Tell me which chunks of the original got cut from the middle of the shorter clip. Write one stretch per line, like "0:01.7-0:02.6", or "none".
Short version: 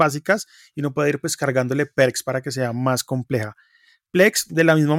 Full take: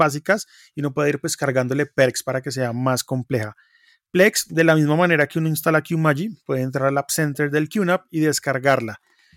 none